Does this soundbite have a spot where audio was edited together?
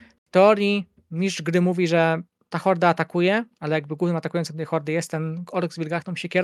no; 0 cuts

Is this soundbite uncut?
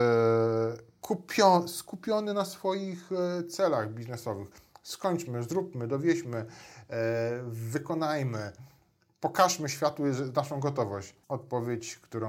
no; 1 cut; at 11.2 s

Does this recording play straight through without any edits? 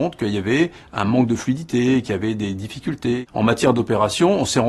yes; 0 cuts

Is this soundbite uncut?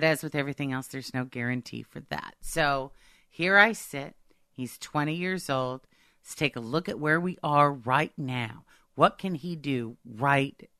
yes; 0 cuts

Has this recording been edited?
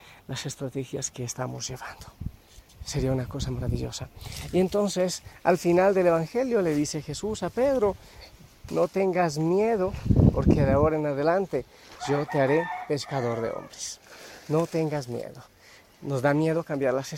yes; 1 cut; at 8.7 s

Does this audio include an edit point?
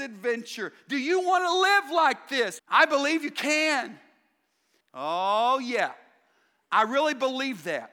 yes; 2 cuts; at 2.6 s, 4.8 s

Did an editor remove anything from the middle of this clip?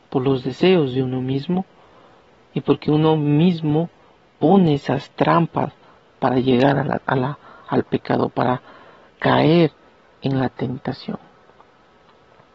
no; 0 cuts

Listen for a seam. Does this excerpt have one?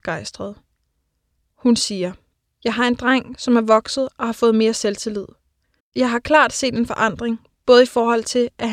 yes; 1 cut; at 5.8 s

